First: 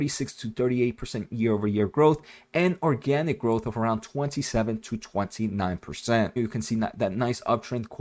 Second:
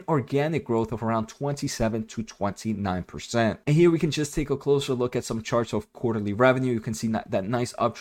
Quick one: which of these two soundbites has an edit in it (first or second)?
first